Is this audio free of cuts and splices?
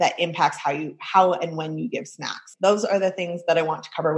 no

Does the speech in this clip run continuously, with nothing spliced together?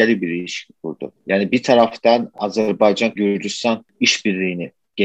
no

